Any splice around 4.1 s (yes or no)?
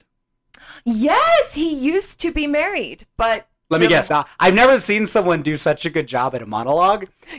yes